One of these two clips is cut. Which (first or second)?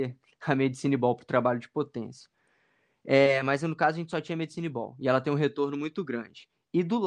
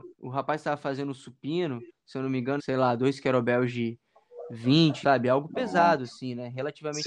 second